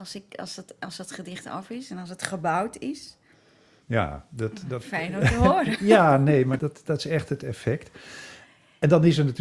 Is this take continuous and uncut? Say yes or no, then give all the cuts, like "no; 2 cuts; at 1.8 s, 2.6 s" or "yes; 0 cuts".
no; 2 cuts; at 3.8 s, 6.6 s